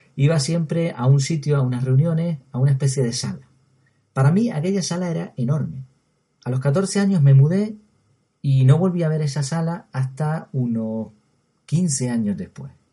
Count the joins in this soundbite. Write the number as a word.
zero